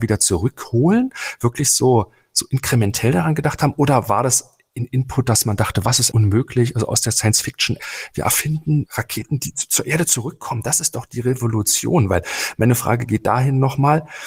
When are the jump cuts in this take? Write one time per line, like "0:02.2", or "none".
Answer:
0:06.1